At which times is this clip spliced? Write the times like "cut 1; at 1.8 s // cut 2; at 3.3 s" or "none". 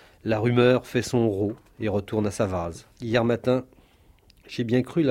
cut 1; at 2.9 s